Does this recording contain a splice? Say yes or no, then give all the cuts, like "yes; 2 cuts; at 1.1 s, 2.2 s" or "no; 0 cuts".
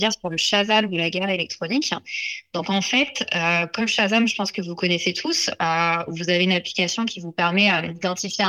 no; 0 cuts